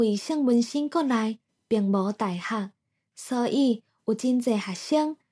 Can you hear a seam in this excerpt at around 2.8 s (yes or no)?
no